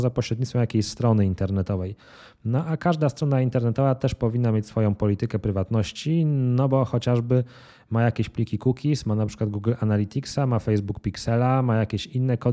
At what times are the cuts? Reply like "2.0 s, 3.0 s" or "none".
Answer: none